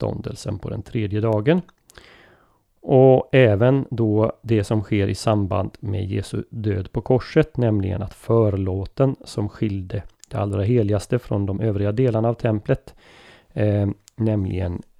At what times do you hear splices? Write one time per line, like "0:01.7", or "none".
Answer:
none